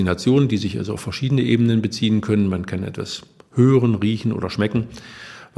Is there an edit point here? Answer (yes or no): no